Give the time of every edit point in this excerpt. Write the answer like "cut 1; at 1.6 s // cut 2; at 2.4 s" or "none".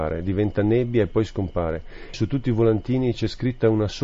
cut 1; at 2.1 s